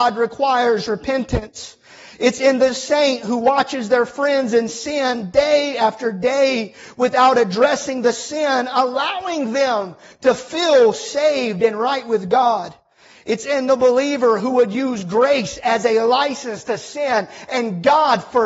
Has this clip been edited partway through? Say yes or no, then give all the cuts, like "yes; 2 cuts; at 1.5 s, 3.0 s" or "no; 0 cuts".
no; 0 cuts